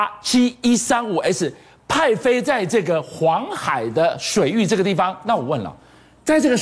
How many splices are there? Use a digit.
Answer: 0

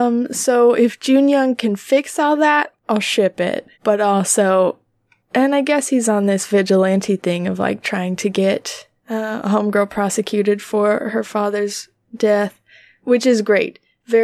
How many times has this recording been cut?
1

